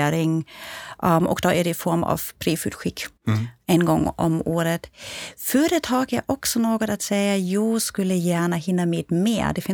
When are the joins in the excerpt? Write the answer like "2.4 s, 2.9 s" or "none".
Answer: 3.2 s

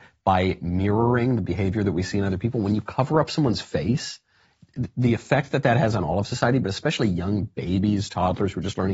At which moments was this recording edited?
none

